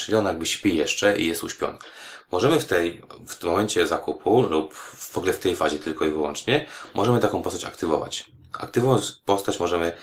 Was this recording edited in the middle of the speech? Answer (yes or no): no